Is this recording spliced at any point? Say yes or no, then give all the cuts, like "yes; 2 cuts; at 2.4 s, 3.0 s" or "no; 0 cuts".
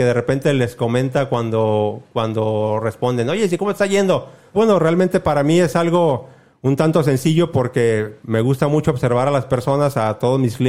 yes; 1 cut; at 4.5 s